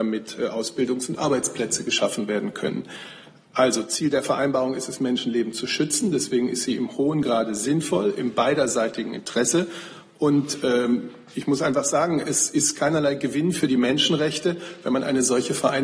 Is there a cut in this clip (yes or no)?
no